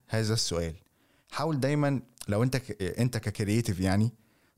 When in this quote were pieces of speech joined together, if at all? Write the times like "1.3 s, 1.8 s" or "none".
none